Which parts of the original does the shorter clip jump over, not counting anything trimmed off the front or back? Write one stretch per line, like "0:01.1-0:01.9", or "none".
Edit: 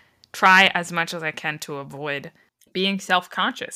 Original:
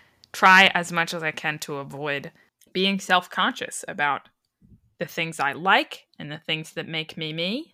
none